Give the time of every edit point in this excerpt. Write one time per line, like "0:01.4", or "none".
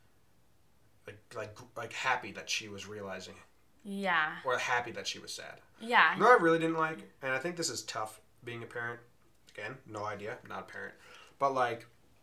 0:05.7